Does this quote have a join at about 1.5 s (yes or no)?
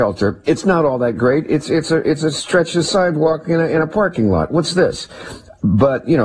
no